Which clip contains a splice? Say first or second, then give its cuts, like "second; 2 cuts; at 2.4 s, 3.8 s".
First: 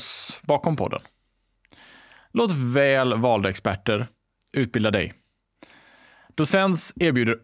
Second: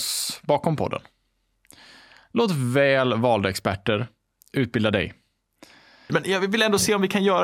second; 1 cut; at 6.1 s